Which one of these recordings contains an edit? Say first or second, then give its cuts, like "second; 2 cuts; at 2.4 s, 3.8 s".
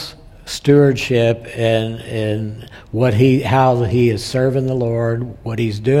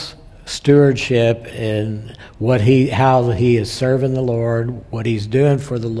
second; 1 cut; at 1.5 s